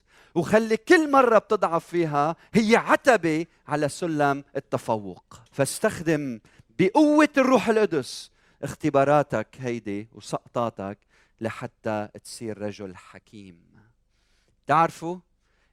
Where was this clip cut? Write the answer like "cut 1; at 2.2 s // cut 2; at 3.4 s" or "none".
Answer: cut 1; at 5.5 s